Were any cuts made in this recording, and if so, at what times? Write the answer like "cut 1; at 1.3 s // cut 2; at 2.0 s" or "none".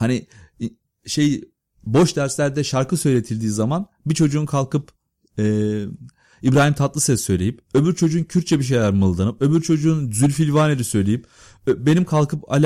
none